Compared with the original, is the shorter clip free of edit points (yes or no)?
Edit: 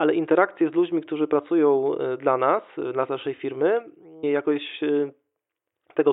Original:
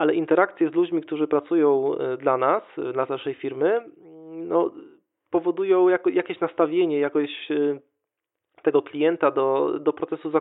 no